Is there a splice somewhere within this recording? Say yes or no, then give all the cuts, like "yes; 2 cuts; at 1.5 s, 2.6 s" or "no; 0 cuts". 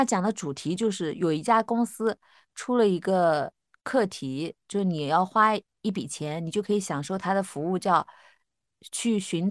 no; 0 cuts